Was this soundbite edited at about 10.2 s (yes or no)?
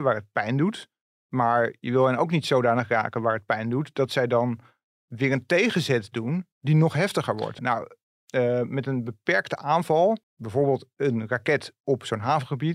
yes